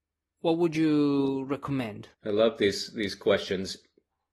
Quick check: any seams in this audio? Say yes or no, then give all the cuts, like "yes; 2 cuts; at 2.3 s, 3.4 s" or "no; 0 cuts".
yes; 1 cut; at 2.1 s